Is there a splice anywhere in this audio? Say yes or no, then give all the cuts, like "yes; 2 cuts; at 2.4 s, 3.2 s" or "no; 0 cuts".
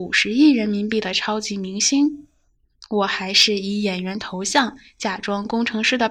no; 0 cuts